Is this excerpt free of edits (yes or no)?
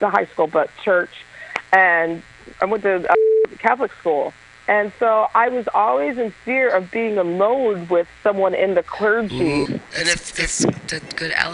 no